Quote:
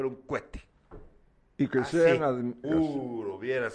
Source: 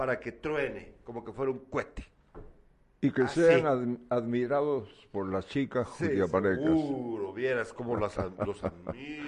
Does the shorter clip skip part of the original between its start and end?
yes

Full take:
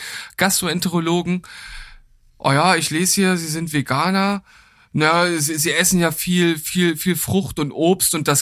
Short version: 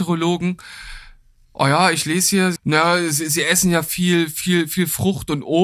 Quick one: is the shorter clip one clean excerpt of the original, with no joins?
no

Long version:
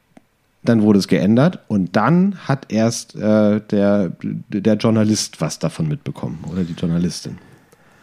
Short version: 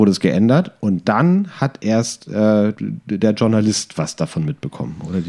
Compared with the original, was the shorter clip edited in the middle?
yes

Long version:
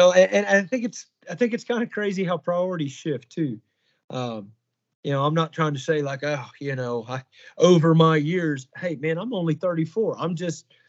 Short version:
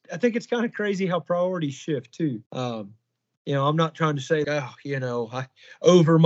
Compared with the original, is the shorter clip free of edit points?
no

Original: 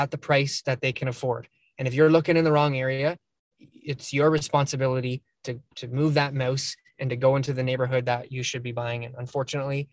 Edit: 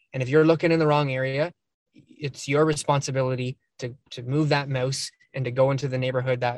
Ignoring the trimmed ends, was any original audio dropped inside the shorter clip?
no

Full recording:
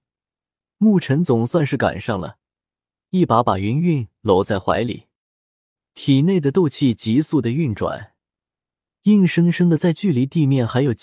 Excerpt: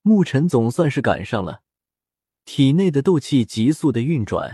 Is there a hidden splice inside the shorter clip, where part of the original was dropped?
yes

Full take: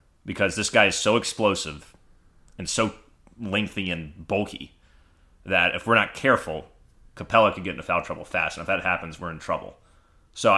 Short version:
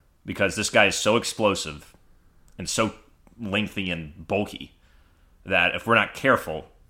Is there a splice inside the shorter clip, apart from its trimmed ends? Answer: no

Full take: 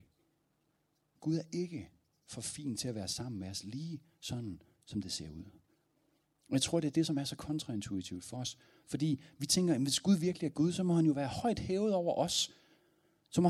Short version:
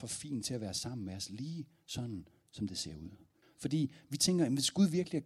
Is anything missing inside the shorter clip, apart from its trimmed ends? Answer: yes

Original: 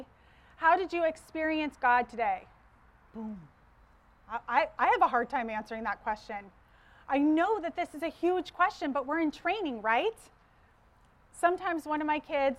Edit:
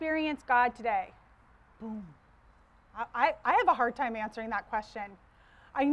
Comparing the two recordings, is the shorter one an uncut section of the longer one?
yes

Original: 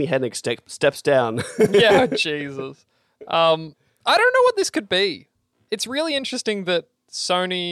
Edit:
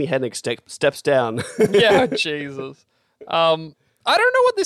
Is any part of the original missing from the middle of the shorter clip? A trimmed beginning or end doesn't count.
no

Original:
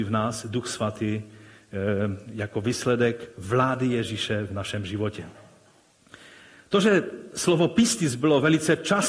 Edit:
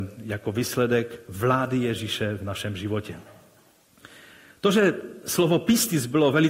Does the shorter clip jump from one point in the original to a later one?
no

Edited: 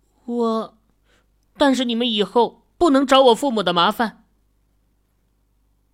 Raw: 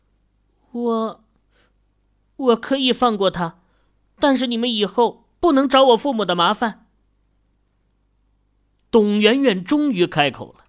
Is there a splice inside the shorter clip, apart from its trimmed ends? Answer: yes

